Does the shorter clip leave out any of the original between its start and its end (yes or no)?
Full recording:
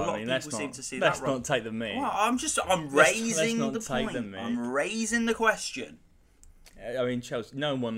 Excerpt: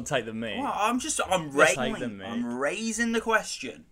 yes